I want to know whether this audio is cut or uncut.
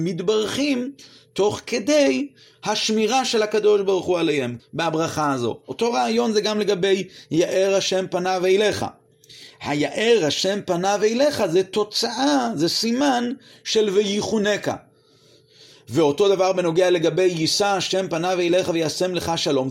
cut